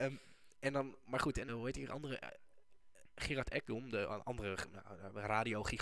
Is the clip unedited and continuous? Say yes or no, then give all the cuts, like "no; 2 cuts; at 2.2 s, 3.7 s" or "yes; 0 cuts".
no; 1 cut; at 1.5 s